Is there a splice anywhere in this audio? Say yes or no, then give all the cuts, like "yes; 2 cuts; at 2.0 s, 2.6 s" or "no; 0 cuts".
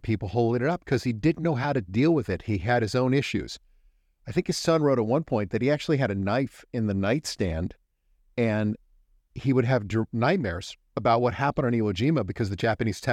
no; 0 cuts